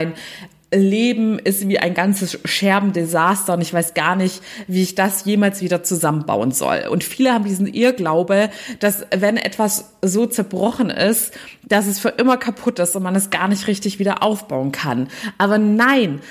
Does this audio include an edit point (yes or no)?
no